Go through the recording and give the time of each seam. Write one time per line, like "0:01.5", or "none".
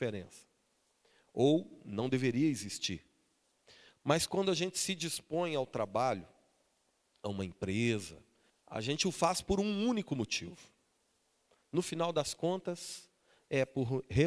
0:08.5